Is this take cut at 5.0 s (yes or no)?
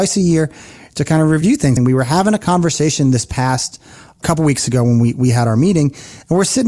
no